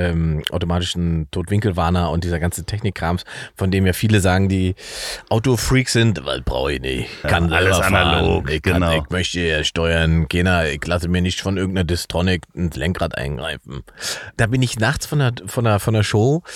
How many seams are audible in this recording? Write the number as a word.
one